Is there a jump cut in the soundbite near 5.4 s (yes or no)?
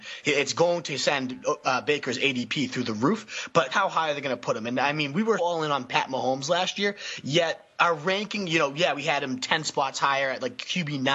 yes